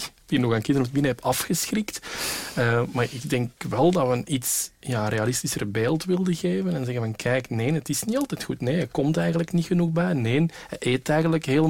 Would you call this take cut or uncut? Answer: uncut